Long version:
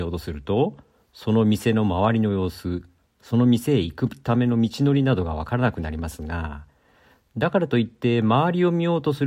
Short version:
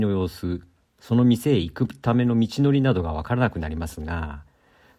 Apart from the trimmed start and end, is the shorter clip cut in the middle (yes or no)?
no